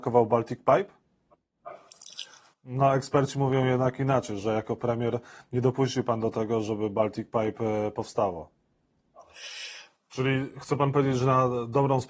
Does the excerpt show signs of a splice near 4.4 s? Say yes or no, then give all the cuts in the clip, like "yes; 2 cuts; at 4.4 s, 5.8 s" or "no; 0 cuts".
no; 2 cuts; at 2.5 s, 10.0 s